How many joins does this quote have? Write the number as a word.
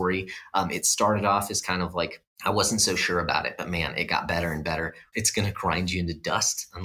two